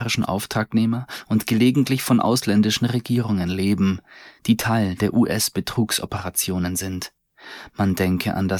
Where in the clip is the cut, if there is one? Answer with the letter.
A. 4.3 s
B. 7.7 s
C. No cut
C